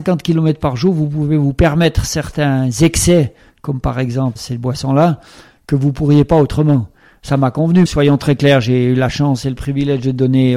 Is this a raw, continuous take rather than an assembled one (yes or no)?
no